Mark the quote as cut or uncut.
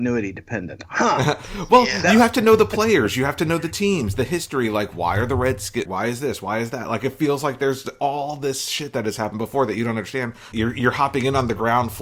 cut